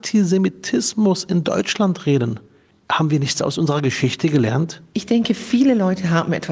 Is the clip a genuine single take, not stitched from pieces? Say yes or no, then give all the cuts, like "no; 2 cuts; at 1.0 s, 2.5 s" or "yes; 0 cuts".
yes; 0 cuts